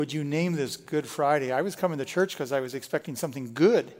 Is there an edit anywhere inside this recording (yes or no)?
no